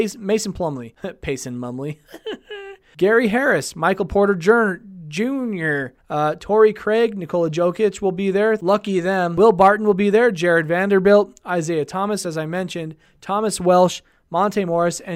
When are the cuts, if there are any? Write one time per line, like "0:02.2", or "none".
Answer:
0:06.0
0:12.2